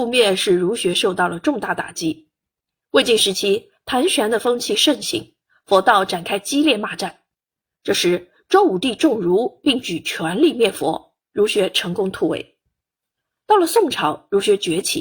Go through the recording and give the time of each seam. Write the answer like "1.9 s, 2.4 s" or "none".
none